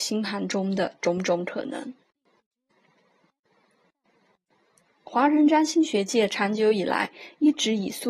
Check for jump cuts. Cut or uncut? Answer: uncut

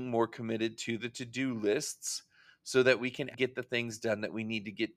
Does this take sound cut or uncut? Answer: cut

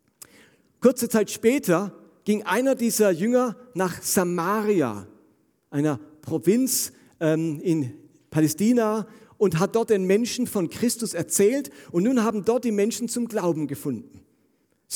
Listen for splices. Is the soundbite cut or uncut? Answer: uncut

